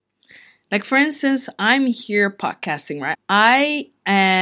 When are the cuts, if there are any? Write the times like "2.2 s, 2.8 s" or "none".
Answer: 3.1 s